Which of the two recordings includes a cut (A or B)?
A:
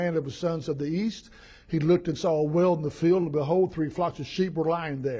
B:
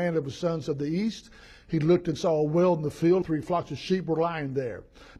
B